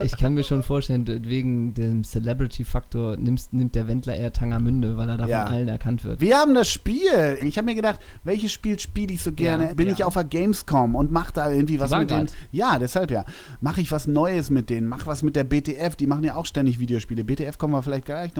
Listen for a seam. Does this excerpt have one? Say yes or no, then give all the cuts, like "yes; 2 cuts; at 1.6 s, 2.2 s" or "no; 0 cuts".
yes; 3 cuts; at 6.2 s, 7.4 s, 9.7 s